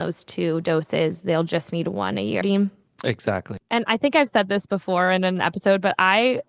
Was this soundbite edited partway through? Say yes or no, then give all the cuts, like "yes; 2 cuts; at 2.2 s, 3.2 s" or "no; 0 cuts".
yes; 2 cuts; at 2.4 s, 3.6 s